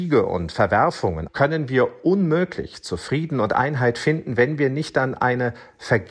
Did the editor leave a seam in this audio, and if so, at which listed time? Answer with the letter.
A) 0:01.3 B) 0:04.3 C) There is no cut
A